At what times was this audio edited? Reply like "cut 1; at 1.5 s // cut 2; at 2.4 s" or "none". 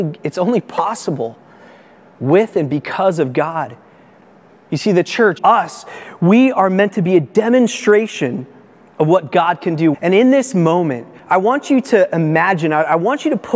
cut 1; at 5.4 s // cut 2; at 9.9 s